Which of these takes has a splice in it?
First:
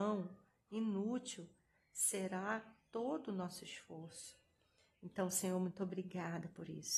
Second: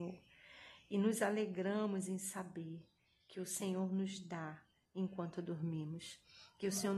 first; 1 cut; at 4.9 s

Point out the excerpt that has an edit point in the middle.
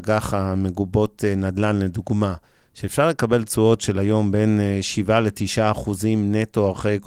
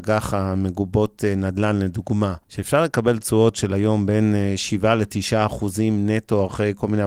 second; 1 cut; at 2.4 s

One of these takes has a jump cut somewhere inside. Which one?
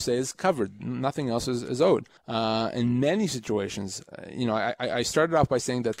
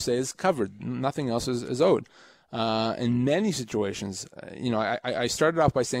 first; 1 cut; at 2.2 s

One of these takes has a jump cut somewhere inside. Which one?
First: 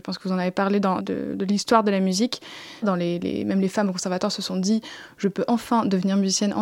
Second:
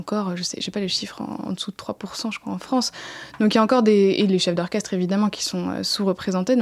first; 2 cuts; at 1.0 s, 2.8 s

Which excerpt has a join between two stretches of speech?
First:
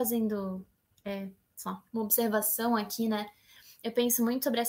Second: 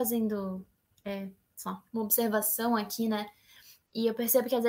second; 1 cut; at 3.8 s

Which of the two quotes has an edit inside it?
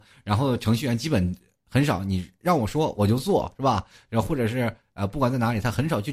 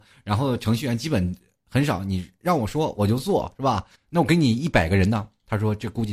second; 1 cut; at 4.0 s

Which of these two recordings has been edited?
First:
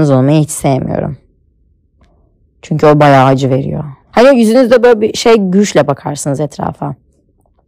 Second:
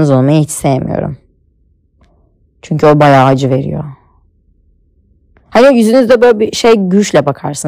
first; 1 cut; at 4.0 s

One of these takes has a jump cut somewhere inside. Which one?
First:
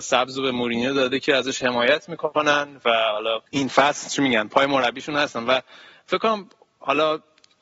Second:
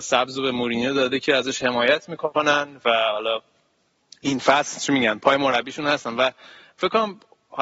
first; 1 cut; at 3.5 s

